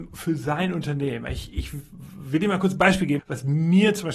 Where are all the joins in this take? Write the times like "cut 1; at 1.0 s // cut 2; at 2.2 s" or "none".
cut 1; at 1.5 s // cut 2; at 3.2 s

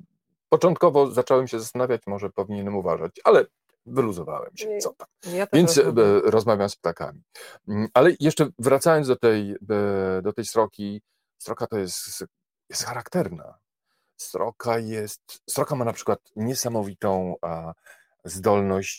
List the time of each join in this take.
none

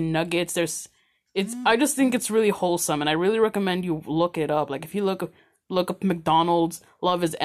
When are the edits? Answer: none

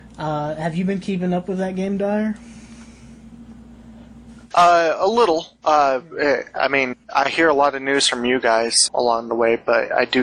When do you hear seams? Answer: cut 1; at 7.0 s // cut 2; at 8.9 s

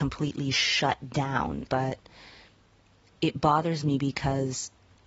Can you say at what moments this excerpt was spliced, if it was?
cut 1; at 1.7 s

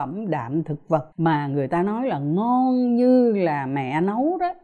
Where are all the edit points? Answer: cut 1; at 1.1 s

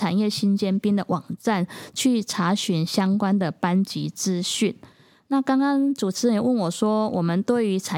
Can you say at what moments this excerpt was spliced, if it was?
none

